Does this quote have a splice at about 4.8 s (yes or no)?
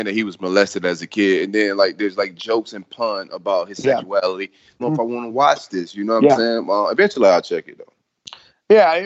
yes